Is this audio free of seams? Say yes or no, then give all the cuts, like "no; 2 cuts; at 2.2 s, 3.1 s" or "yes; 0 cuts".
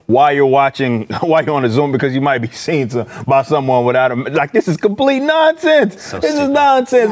yes; 0 cuts